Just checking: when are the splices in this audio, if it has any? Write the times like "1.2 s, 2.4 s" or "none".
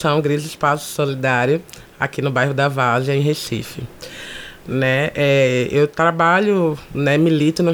none